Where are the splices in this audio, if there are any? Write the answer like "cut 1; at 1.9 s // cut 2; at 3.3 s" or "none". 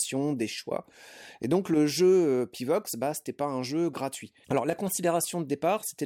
cut 1; at 4.4 s